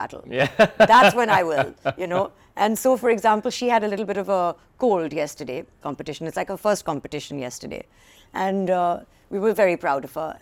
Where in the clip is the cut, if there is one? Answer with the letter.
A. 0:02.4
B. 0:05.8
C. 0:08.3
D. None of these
B